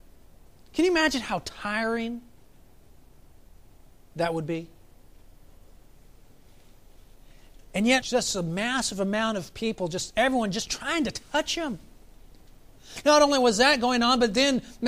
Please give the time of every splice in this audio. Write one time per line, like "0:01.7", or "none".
0:08.0